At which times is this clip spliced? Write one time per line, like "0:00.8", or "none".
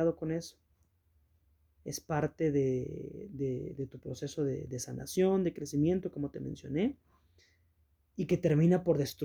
none